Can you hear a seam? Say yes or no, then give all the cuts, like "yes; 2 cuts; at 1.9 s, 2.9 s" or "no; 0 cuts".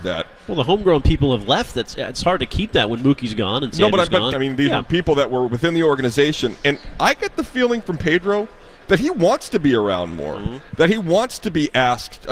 yes; 1 cut; at 4.3 s